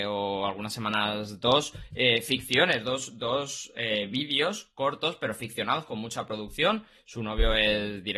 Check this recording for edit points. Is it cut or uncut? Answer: uncut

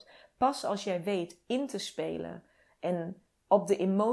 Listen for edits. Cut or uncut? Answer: uncut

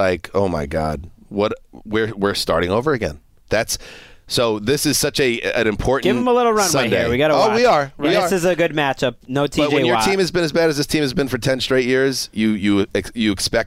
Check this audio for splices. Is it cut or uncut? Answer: uncut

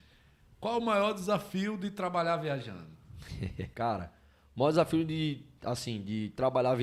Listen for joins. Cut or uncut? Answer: cut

